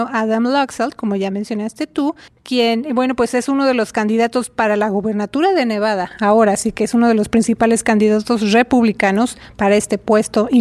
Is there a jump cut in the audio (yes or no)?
no